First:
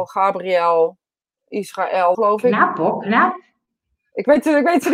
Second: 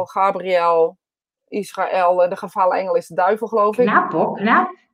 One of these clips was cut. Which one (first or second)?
first